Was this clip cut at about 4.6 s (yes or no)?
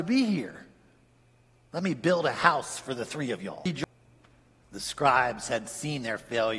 yes